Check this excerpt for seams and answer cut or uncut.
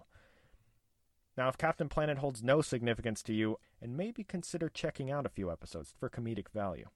cut